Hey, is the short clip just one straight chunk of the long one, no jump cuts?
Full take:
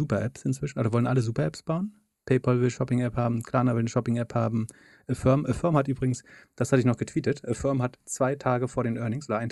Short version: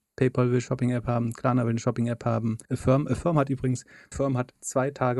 no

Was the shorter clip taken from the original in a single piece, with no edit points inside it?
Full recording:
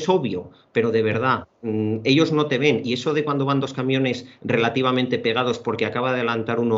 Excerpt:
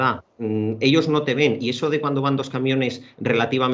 yes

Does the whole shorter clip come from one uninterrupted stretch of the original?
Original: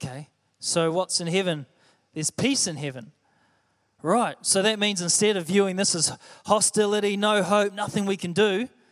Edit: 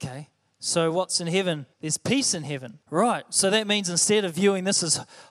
no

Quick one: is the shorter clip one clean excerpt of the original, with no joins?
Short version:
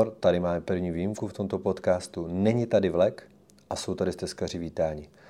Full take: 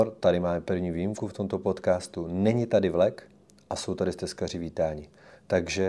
yes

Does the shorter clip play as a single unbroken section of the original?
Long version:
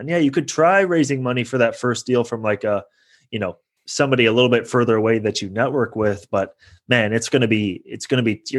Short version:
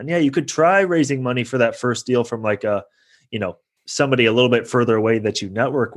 yes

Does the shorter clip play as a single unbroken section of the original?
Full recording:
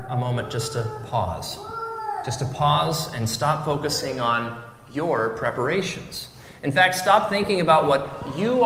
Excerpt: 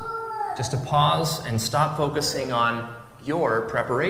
yes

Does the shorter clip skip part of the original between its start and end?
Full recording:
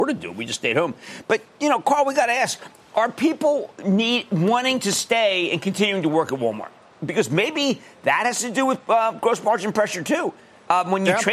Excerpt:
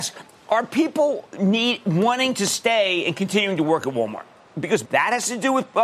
yes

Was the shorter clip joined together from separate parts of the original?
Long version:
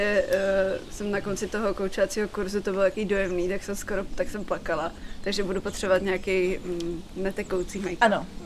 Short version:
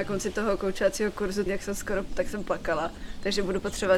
yes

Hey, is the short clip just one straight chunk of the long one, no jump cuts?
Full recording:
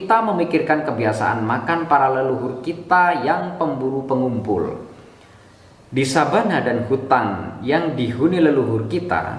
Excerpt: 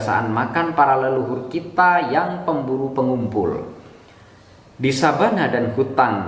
yes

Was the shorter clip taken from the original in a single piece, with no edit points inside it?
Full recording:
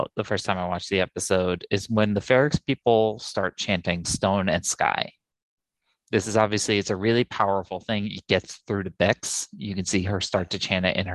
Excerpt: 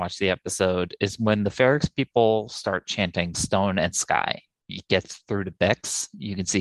no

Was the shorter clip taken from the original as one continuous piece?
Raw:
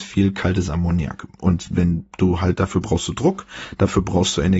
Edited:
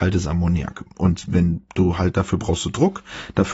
yes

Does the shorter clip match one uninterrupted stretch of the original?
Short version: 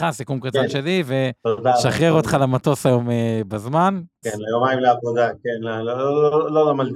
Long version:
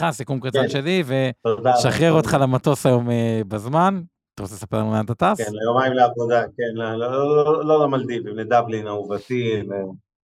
no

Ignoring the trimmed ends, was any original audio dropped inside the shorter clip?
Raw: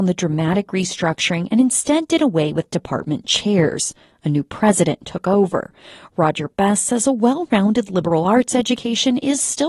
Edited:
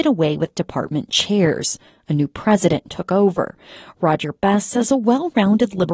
no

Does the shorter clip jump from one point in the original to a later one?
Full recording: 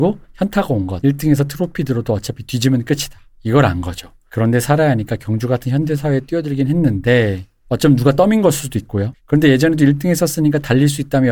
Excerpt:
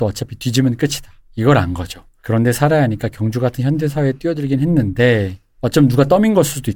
no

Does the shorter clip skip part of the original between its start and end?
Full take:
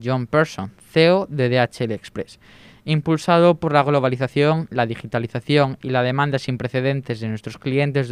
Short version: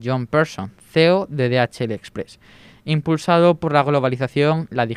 no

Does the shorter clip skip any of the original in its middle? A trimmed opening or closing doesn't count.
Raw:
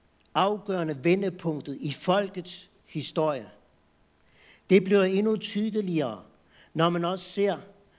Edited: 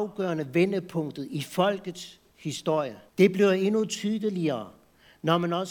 yes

